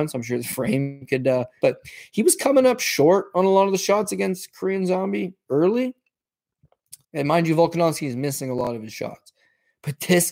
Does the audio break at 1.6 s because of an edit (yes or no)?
yes